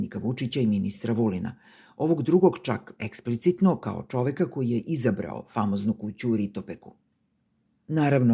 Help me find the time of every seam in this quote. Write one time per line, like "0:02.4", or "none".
none